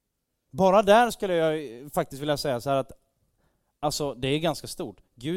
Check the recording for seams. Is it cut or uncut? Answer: uncut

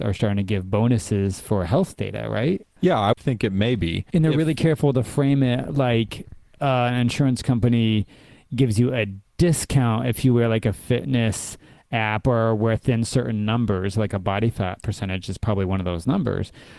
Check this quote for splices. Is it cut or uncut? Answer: uncut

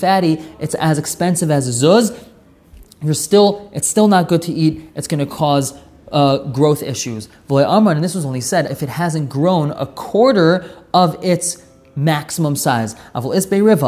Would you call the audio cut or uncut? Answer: cut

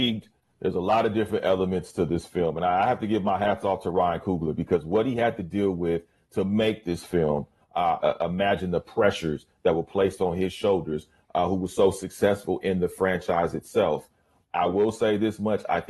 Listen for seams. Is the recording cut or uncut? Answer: cut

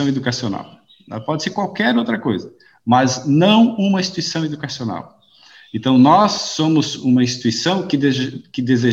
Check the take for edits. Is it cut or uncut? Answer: uncut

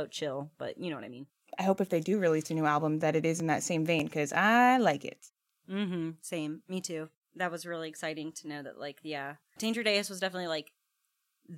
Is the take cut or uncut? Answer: cut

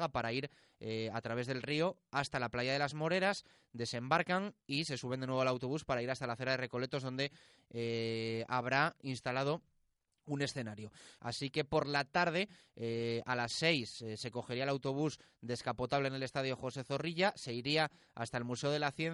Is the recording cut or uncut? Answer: cut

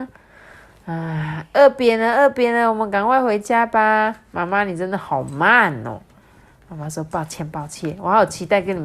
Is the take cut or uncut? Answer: uncut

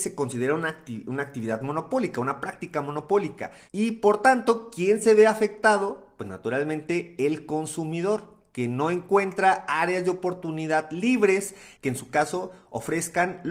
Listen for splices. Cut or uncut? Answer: cut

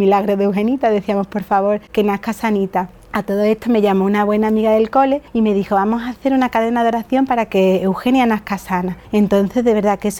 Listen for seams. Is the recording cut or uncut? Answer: uncut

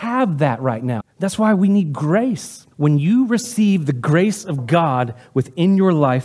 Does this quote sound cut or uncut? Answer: cut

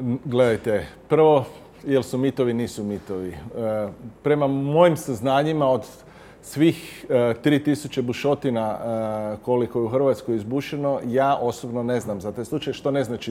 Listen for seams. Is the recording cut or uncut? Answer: uncut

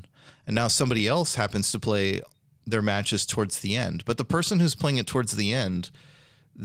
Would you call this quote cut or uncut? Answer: uncut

